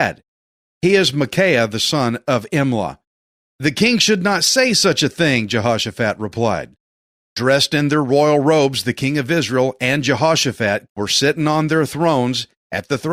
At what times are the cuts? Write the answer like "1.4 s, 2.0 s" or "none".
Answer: 7.1 s, 10.9 s